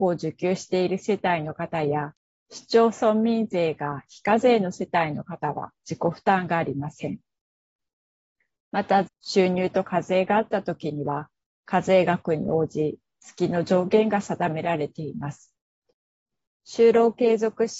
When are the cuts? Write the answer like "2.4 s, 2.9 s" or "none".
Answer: 9.1 s, 16.5 s